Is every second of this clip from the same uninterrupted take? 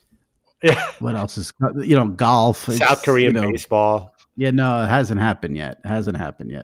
yes; 0 cuts

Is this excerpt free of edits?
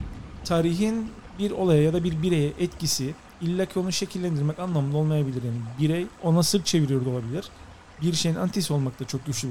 yes; 0 cuts

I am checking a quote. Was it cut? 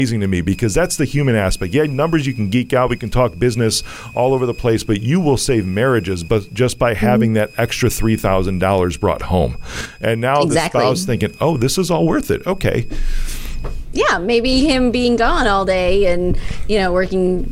no; 0 cuts

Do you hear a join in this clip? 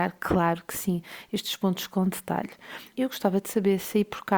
yes; 1 cut; at 2.9 s

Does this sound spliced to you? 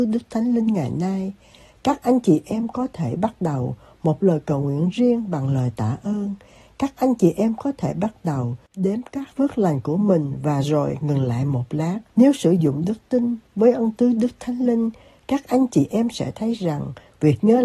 yes; 1 cut; at 12.1 s

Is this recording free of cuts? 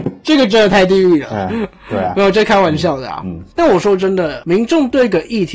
yes; 0 cuts

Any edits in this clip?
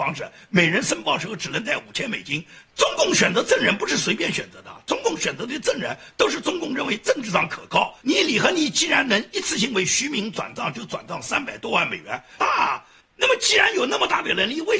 yes; 3 cuts; at 2.7 s, 8.0 s, 12.4 s

